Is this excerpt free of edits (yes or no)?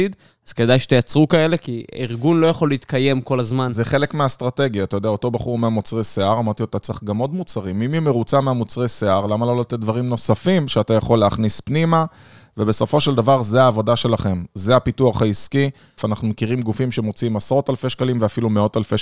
no